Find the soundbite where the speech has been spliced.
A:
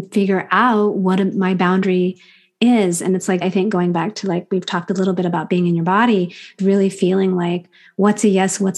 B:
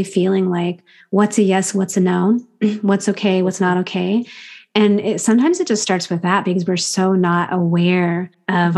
A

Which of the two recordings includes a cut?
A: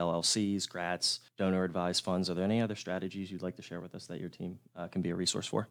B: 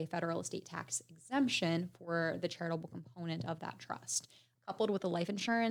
B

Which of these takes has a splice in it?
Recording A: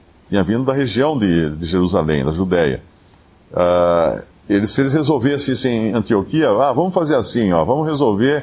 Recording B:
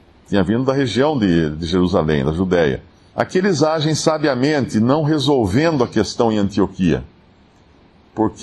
B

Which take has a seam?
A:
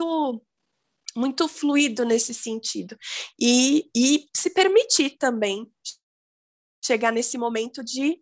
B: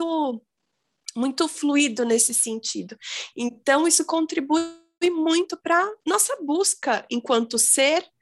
B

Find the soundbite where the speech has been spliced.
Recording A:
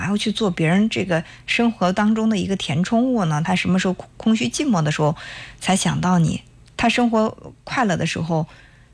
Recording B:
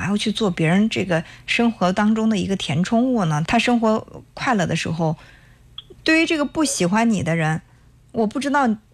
B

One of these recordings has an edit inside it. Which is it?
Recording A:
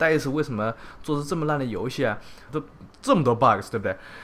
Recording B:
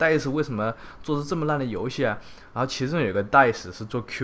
A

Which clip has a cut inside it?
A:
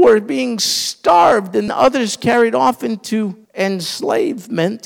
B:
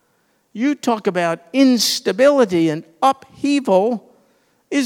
A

